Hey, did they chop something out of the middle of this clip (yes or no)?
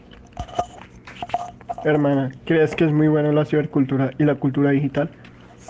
no